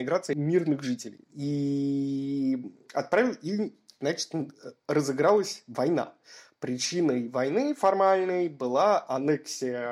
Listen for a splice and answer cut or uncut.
cut